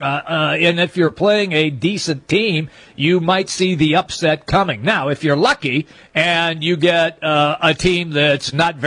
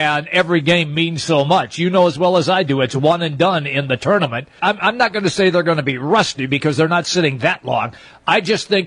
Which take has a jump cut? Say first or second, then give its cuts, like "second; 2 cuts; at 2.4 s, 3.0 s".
second; 1 cut; at 4.6 s